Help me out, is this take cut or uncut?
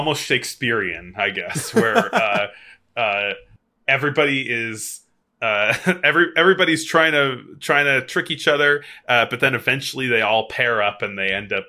uncut